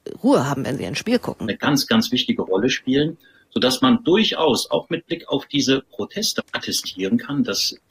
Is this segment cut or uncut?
cut